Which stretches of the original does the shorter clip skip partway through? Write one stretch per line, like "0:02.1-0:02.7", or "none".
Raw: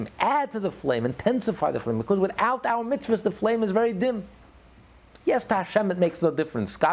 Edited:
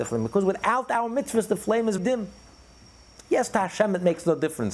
0:03.7-0:03.9